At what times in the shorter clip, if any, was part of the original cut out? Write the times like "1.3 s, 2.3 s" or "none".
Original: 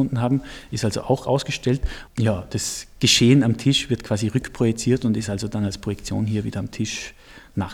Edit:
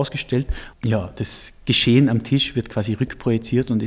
none